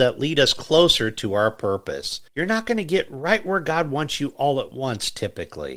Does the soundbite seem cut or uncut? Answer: cut